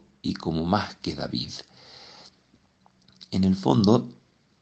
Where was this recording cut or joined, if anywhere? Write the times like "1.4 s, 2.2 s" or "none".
none